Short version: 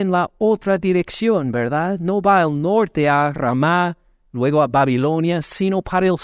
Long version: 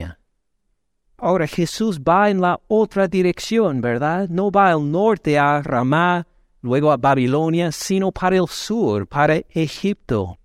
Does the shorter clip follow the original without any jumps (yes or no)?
yes